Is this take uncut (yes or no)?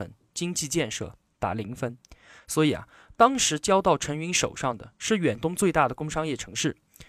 yes